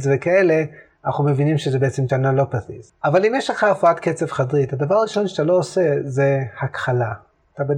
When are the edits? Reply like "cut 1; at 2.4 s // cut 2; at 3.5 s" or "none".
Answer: none

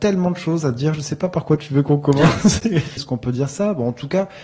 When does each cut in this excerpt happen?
cut 1; at 3.0 s

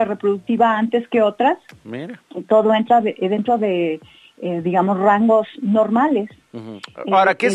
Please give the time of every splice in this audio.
none

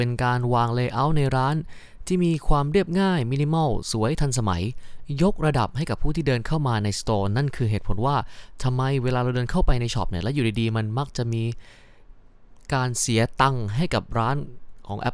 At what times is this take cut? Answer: none

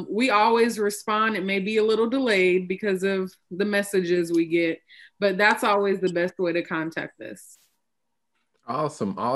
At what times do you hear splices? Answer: none

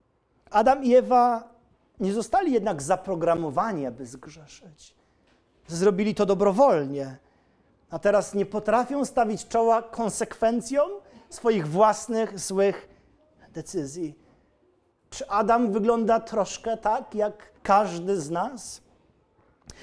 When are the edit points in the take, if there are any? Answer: cut 1; at 14.9 s // cut 2; at 17.6 s

